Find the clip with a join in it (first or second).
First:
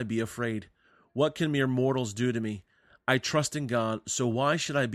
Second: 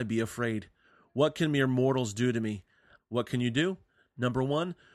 second